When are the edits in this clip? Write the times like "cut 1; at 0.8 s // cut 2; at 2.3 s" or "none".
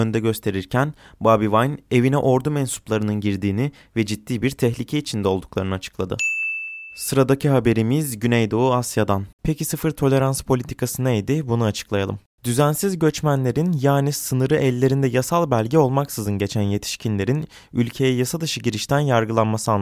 cut 1; at 9.3 s